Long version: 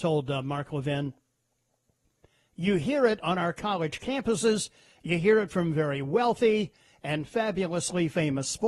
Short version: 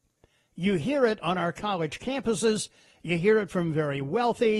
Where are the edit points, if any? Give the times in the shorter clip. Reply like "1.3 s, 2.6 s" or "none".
none